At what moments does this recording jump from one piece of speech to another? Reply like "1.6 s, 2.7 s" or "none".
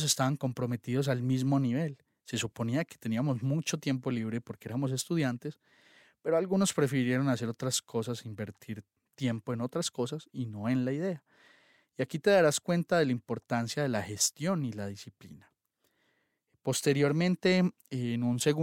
none